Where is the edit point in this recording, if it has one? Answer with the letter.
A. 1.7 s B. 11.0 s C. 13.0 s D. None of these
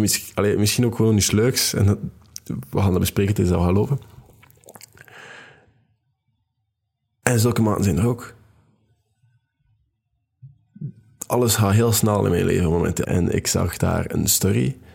C